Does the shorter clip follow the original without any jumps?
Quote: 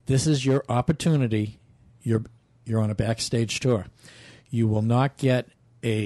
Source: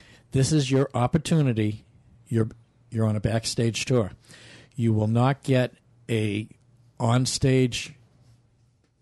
yes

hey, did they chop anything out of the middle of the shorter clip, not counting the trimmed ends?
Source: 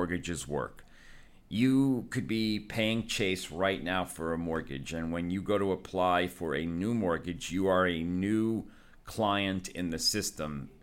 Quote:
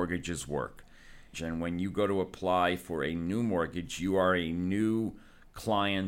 yes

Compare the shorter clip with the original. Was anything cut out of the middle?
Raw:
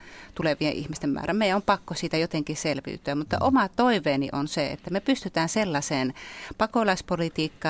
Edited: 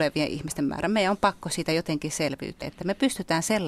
yes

